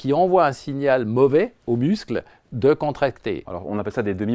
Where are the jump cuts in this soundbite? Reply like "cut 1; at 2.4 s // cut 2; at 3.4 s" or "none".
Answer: cut 1; at 3.5 s